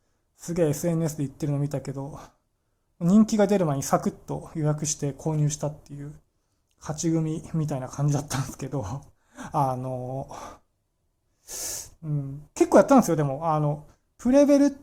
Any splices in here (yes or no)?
yes